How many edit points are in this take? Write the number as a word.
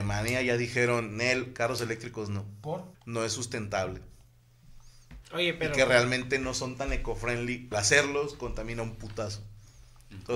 three